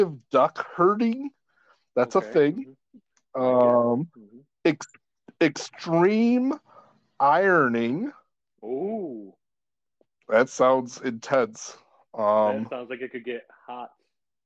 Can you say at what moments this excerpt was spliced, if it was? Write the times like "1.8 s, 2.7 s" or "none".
none